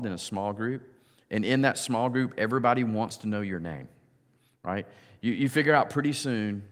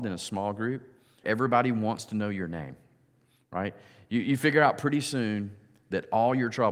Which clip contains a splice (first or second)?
second